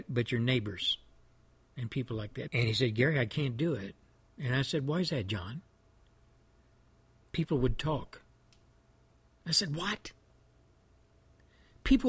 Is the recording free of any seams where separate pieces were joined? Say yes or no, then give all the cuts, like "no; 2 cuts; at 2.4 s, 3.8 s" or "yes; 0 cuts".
no; 1 cut; at 2.5 s